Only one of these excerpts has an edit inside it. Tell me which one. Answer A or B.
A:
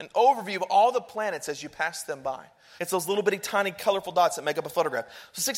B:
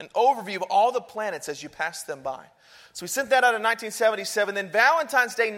A